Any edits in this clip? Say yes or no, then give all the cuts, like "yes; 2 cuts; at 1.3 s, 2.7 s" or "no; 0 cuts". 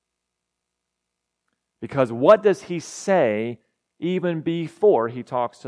no; 0 cuts